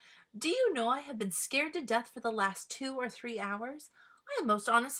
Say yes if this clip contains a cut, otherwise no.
no